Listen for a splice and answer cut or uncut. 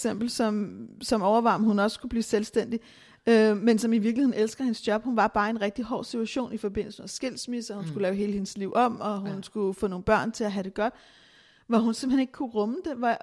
uncut